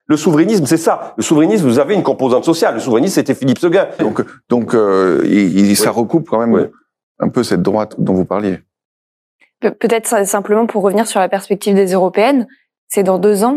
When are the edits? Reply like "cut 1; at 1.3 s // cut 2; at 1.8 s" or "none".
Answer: cut 1; at 4.0 s